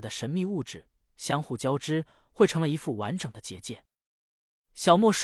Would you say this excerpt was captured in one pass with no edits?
yes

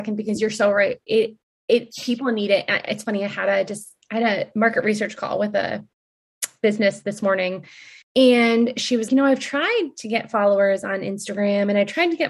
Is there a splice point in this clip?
yes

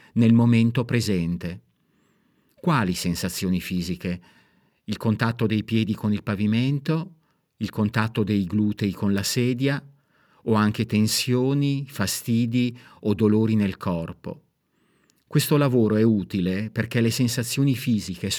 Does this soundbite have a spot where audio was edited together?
no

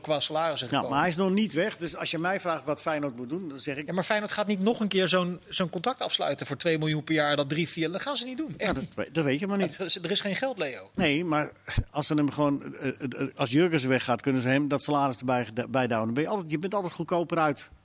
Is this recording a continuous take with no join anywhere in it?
no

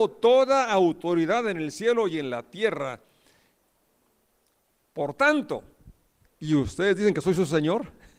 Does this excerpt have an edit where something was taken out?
yes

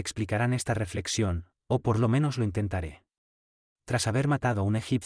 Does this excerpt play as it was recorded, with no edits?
no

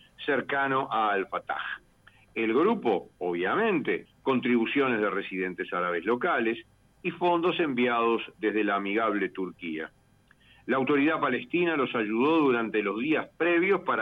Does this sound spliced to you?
yes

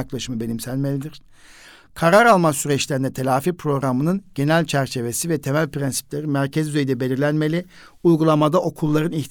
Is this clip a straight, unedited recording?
yes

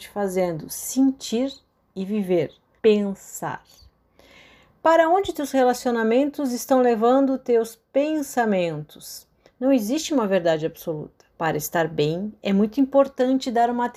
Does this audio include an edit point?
yes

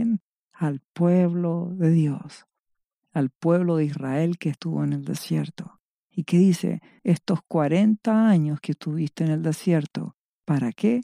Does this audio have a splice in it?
no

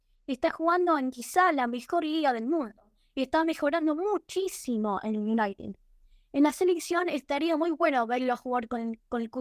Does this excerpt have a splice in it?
no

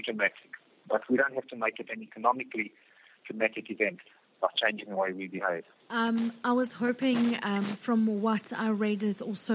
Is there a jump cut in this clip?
yes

